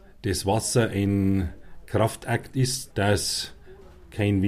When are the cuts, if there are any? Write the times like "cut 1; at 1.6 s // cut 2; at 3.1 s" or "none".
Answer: cut 1; at 2.9 s